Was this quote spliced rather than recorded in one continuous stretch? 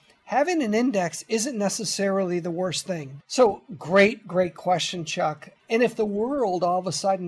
yes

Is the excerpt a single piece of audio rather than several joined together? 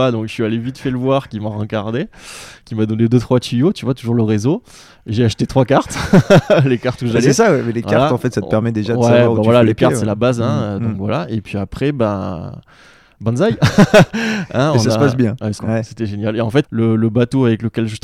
no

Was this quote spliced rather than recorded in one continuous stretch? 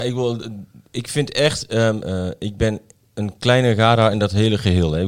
yes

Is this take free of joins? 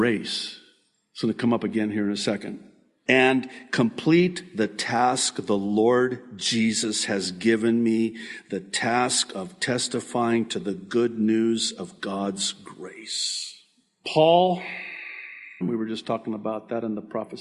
no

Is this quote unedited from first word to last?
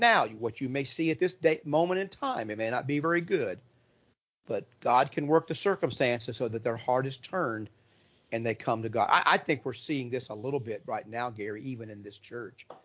yes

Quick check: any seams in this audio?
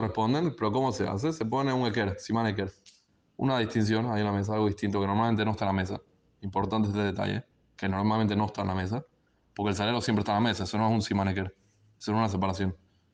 no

